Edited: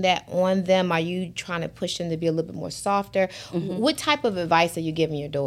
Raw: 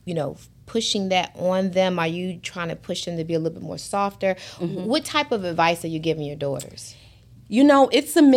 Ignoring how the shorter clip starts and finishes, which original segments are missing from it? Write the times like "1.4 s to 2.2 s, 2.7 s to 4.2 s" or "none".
none